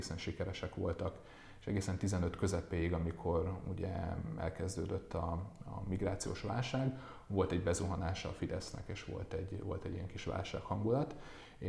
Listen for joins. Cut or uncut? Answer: uncut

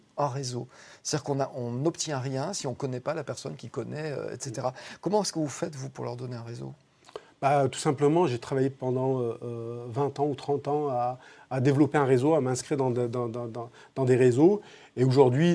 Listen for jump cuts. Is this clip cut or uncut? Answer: uncut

